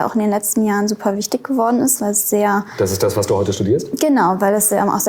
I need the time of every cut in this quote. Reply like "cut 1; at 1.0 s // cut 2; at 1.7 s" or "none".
none